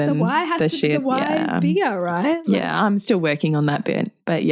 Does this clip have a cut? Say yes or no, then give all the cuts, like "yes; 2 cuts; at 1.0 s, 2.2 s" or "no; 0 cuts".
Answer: no; 0 cuts